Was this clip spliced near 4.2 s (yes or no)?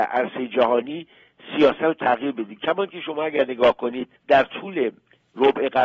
yes